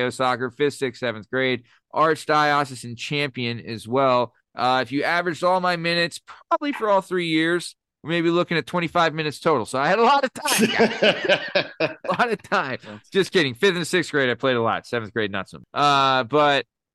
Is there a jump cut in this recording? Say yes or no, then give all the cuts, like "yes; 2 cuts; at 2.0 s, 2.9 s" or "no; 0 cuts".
no; 0 cuts